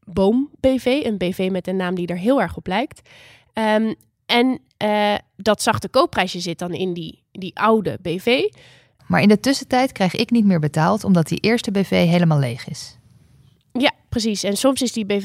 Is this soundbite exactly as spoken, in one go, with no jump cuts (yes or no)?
no